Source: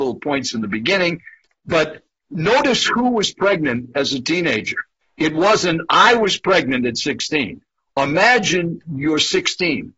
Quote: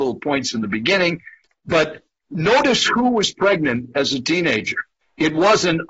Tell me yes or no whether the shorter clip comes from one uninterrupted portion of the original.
yes